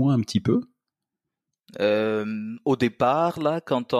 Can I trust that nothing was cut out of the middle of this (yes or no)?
yes